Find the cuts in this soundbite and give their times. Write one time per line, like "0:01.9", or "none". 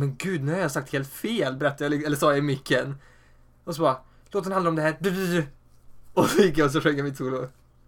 none